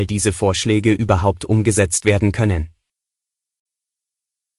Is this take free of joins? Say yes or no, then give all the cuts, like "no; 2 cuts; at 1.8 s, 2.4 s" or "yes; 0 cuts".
yes; 0 cuts